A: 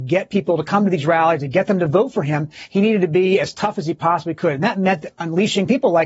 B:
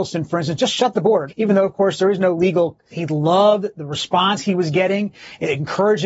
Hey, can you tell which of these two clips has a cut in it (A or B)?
B